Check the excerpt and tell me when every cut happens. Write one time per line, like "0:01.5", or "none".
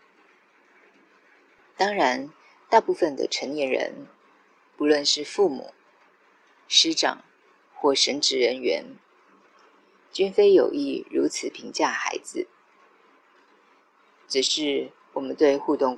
none